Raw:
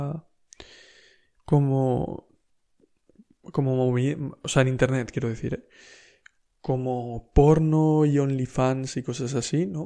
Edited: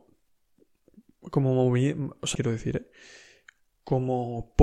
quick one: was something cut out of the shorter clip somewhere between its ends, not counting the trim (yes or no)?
yes